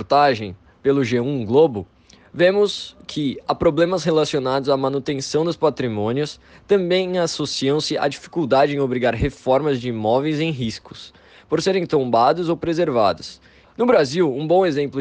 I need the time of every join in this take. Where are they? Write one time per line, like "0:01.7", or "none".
0:13.6